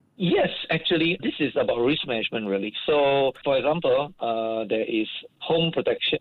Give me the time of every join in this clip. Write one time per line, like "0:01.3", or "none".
0:01.2
0:05.3